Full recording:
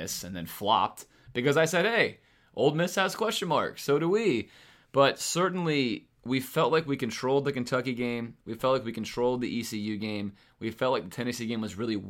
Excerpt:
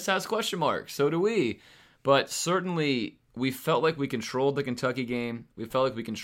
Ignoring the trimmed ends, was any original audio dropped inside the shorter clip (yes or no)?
no